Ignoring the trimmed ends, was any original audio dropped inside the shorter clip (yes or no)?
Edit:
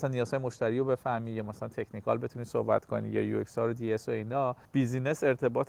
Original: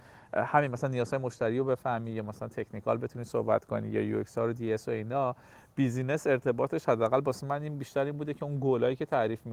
yes